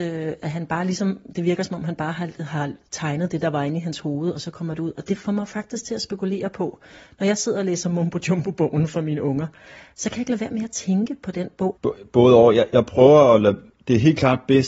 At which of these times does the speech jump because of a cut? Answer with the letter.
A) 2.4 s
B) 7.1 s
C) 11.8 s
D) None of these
C